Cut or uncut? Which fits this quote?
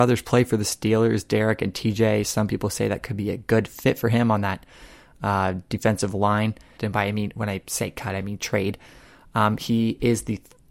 cut